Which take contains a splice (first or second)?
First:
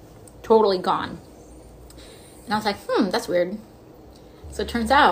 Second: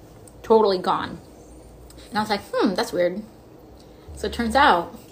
second